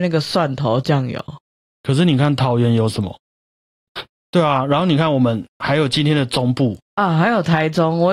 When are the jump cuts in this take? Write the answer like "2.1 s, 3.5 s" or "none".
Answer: 3.9 s